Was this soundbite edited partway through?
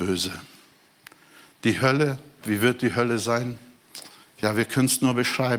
yes; 1 cut; at 2.4 s

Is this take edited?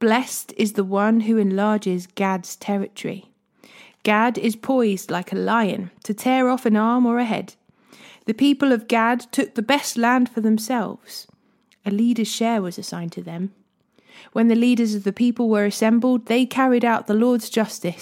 no; 0 cuts

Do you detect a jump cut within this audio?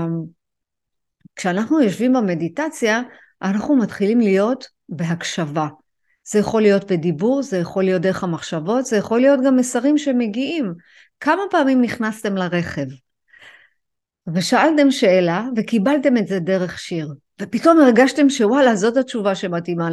no; 0 cuts

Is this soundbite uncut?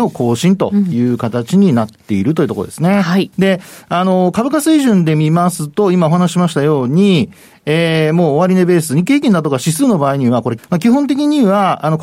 no; 2 cuts; at 3.3 s, 10.6 s

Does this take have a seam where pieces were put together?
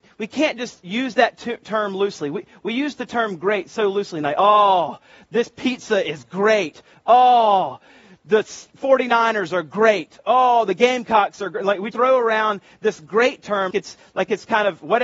yes; 2 cuts; at 11.9 s, 13.7 s

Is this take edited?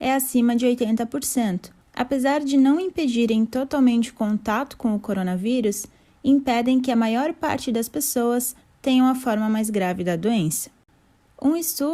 yes; 1 cut; at 1.8 s

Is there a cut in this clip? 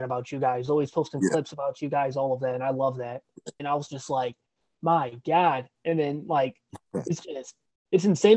yes; 1 cut; at 3.6 s

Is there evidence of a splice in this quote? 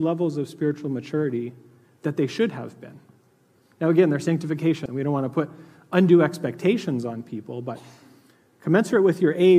yes; 1 cut; at 4.9 s

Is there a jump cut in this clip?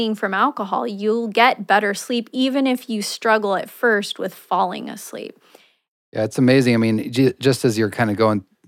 no; 0 cuts

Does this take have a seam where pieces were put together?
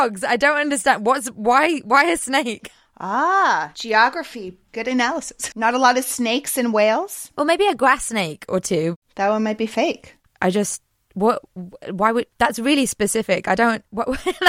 yes; 3 cuts; at 5.5 s, 10.3 s, 12.3 s

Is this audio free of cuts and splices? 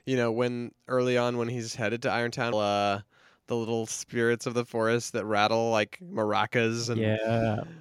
no; 1 cut; at 2.5 s

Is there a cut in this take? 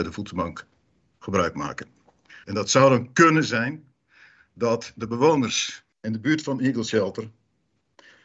yes; 2 cuts; at 2.4 s, 5.9 s

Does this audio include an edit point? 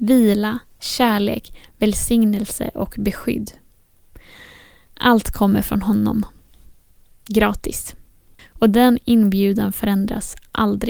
yes; 1 cut; at 8.4 s

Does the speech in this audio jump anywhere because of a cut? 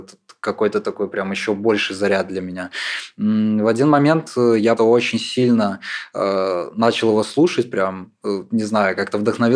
yes; 1 cut; at 4.8 s

